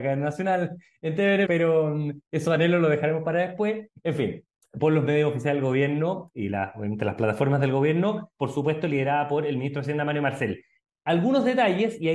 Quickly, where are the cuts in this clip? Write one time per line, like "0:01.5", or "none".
0:01.5
0:04.8
0:08.4